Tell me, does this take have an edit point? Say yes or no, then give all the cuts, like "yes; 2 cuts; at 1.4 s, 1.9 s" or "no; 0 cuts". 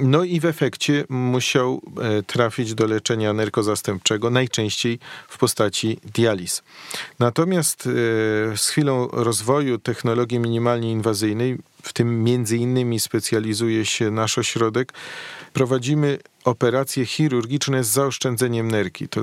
no; 0 cuts